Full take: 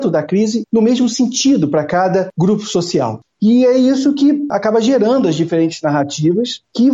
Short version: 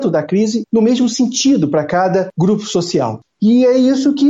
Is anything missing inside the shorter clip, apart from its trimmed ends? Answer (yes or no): no